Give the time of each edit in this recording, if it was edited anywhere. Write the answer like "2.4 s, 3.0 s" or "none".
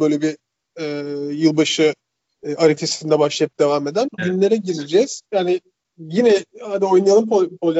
4.2 s, 5.3 s